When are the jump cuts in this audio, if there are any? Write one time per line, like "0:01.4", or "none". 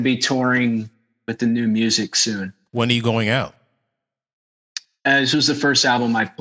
0:02.7
0:05.0